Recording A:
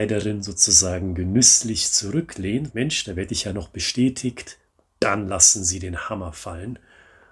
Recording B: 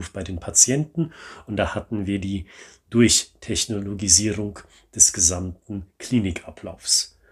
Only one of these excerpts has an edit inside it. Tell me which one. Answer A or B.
A